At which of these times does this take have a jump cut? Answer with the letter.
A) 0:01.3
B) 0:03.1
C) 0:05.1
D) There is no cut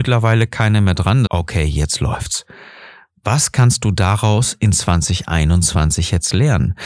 A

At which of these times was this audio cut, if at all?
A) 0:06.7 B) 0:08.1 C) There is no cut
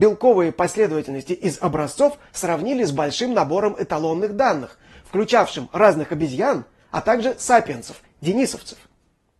B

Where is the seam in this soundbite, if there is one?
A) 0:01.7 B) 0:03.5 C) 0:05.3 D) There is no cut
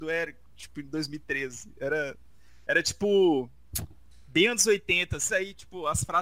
C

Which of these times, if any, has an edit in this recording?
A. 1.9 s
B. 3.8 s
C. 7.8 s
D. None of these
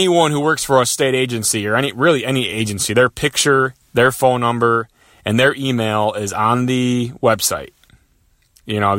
D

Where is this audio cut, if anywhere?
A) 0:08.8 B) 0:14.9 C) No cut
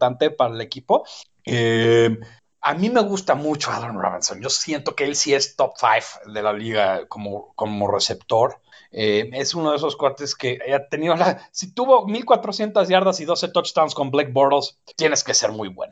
B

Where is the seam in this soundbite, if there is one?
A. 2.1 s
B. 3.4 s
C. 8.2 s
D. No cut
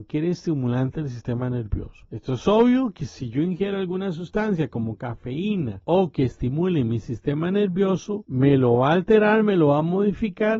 D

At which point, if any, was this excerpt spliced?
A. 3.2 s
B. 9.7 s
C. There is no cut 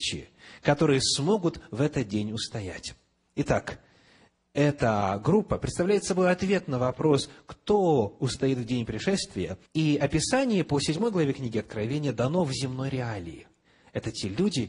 B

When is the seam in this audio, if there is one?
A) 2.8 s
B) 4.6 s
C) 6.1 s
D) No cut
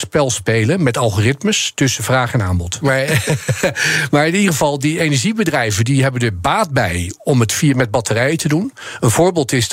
A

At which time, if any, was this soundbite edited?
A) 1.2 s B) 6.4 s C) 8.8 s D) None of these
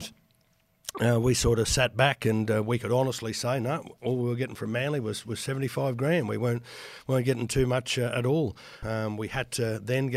C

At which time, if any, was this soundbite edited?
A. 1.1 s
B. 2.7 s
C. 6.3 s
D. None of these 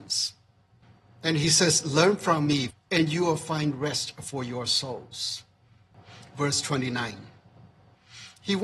B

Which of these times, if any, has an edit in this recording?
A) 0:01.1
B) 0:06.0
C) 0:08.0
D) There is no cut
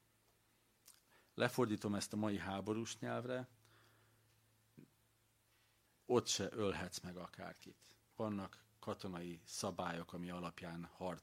C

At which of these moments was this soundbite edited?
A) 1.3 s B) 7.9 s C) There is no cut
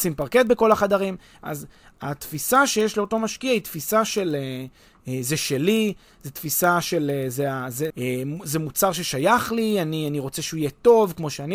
B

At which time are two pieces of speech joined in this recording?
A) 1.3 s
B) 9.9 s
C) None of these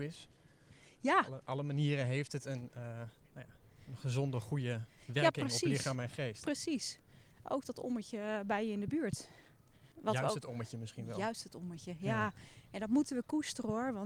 B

